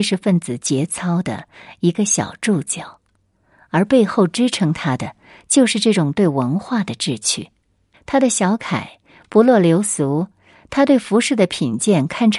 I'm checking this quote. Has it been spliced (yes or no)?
yes